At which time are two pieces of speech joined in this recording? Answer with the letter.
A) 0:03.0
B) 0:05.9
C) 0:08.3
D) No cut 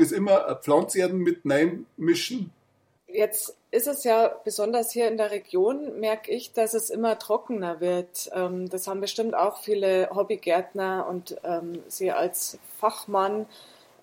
A